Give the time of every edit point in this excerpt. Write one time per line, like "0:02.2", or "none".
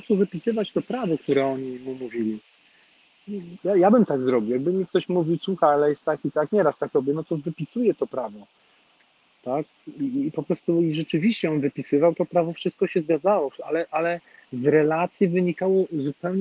0:03.6